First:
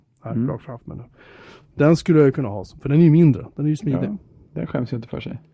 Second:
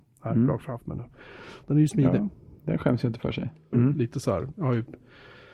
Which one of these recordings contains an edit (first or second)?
second